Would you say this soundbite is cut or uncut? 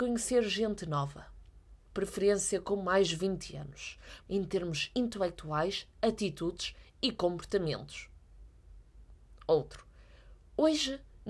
cut